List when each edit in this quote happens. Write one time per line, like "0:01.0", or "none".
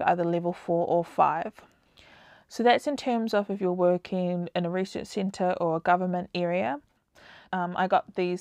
0:07.5